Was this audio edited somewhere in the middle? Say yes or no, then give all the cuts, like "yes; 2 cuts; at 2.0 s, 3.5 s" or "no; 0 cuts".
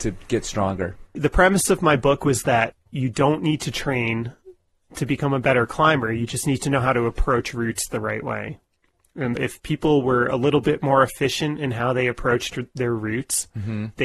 yes; 1 cut; at 9.4 s